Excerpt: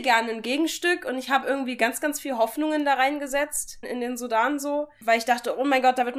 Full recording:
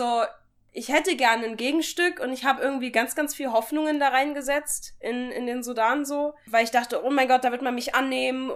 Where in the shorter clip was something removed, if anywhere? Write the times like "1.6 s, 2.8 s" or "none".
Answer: 3.8 s

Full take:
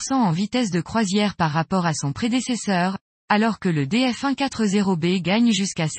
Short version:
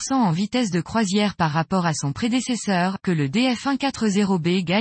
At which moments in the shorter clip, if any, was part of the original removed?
3.0 s

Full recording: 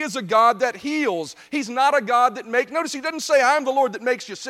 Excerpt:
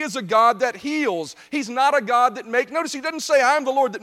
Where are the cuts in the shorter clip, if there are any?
none

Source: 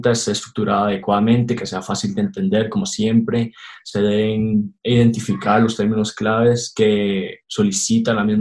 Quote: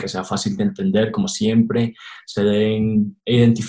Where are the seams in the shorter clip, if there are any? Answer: none

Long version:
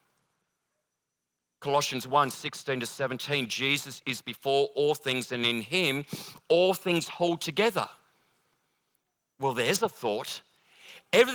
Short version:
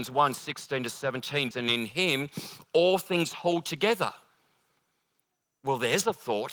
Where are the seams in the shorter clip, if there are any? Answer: 1.5 s

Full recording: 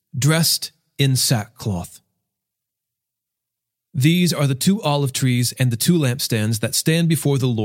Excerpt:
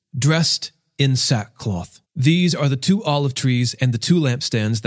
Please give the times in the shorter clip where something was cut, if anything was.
2.0 s

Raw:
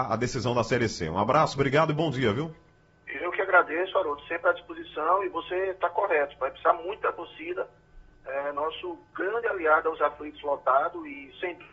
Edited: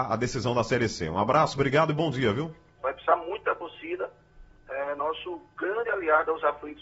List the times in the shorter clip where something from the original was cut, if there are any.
2.8 s

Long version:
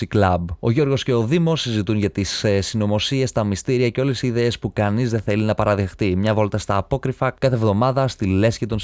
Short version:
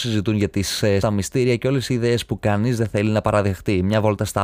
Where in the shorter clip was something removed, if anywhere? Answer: 1.0 s

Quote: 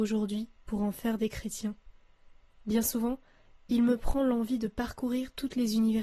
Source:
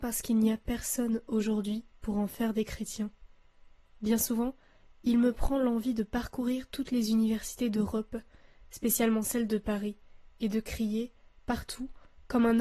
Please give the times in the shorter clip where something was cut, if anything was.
none

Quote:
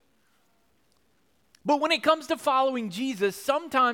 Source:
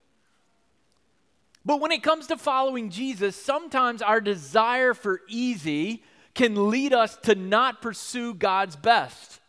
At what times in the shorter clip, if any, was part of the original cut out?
none

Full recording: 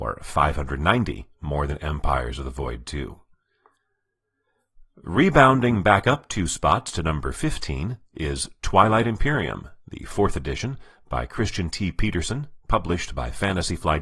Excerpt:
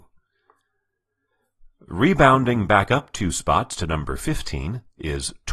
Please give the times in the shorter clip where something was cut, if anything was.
none

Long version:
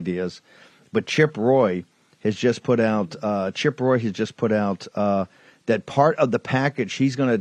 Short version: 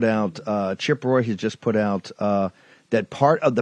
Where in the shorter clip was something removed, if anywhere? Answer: none

